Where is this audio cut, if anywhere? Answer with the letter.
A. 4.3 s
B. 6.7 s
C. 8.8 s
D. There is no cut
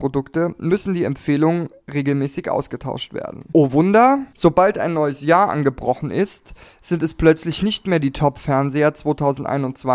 D